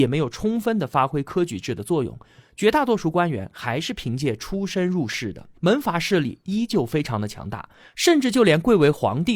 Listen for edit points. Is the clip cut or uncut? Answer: cut